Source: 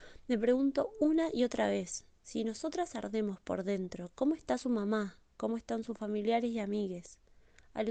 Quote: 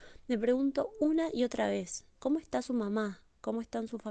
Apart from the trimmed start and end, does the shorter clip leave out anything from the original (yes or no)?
yes